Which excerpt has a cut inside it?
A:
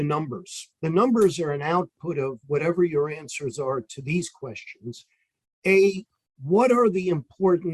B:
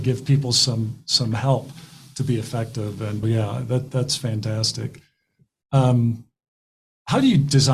B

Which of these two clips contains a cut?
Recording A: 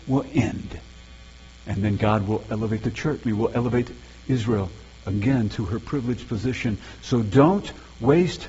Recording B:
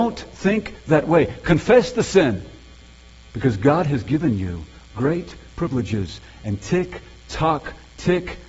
A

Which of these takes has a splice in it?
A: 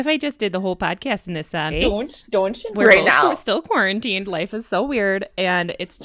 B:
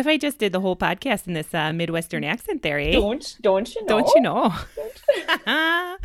A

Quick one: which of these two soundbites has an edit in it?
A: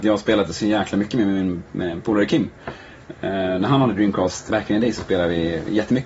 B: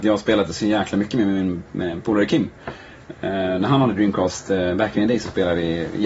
A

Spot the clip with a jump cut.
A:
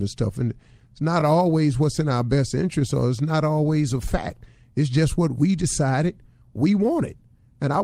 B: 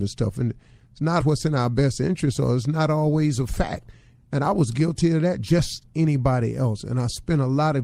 B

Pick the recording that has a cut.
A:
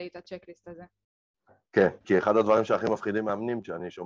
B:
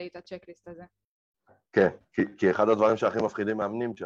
A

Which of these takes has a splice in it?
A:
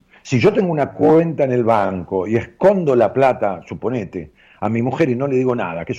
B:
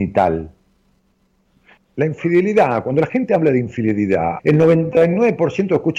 B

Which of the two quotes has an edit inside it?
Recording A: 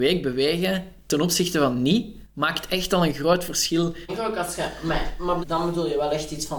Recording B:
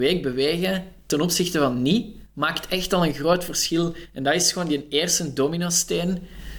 A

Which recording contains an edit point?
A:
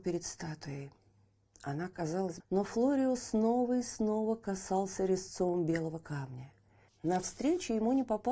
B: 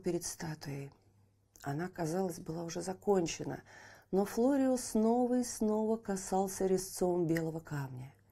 A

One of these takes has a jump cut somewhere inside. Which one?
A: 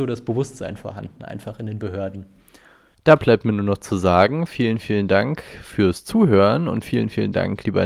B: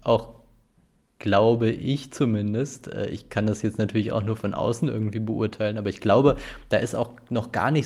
A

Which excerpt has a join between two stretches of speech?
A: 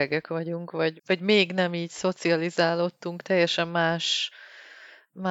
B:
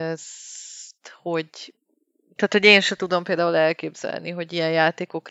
A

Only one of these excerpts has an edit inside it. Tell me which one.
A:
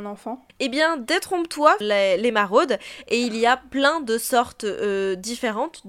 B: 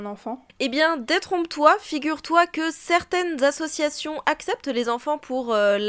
A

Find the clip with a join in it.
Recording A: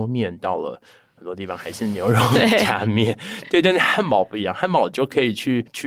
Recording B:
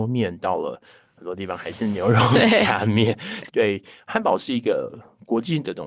B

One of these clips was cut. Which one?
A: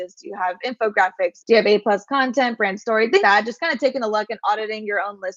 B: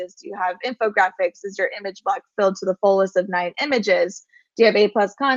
A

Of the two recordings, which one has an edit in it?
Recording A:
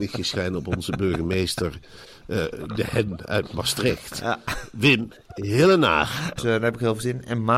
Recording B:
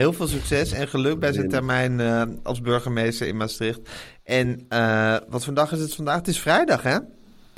A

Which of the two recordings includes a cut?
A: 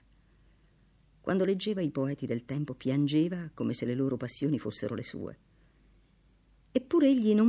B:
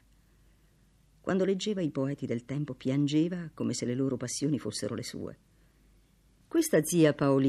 B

